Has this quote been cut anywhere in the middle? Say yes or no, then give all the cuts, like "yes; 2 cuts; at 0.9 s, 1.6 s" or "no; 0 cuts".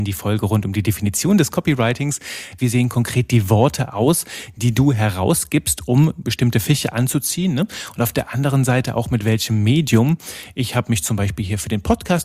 yes; 1 cut; at 2.6 s